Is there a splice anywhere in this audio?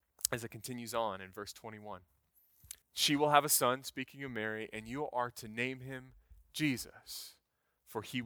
yes; 1 cut; at 2.8 s

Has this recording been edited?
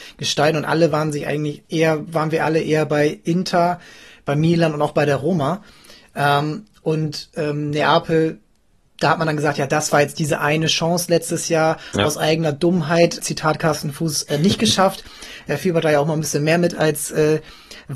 yes; 2 cuts; at 1.7 s, 13.2 s

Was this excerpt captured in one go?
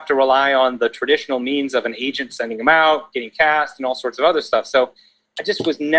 yes; 0 cuts

